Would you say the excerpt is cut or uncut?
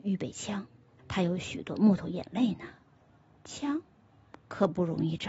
cut